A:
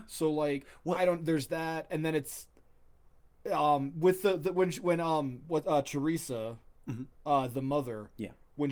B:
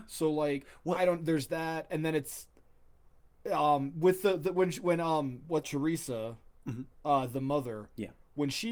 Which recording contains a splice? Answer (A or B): B